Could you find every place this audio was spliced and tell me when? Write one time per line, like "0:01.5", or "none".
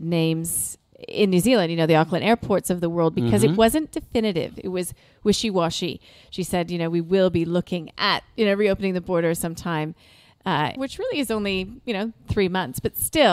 0:10.8